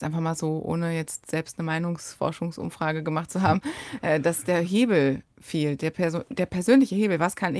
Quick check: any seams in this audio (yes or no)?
no